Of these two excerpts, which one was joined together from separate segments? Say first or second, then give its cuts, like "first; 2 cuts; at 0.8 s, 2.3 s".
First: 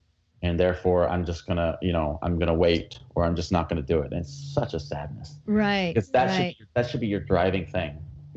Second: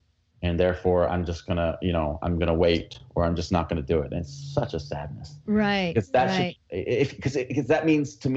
second; 1 cut; at 6.6 s